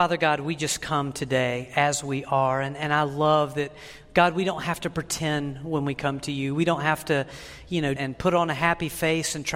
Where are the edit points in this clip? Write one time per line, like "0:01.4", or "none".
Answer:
0:08.0